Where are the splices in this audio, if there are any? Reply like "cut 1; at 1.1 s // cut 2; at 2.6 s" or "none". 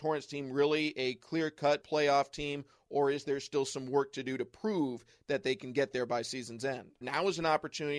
cut 1; at 1.8 s // cut 2; at 7.0 s